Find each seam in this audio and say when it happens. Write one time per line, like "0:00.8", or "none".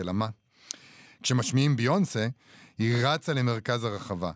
0:01.0